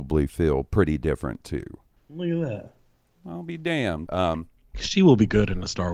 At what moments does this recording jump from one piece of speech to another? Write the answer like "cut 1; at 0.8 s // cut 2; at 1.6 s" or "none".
cut 1; at 2.0 s // cut 2; at 4.1 s